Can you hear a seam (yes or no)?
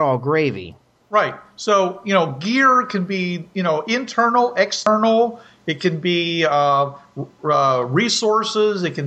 no